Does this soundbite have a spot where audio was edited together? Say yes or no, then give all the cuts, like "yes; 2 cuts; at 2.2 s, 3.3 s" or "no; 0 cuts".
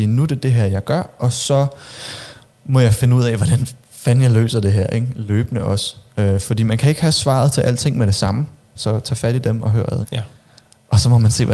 yes; 2 cuts; at 8.7 s, 10.0 s